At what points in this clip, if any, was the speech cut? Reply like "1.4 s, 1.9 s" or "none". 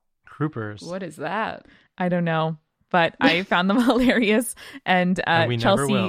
none